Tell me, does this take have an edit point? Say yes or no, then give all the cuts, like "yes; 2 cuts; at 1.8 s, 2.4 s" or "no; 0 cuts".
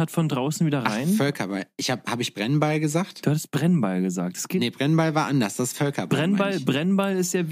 no; 0 cuts